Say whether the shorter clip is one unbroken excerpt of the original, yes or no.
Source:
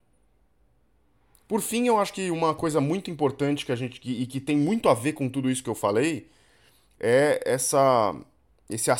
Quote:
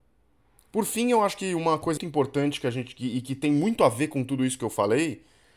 no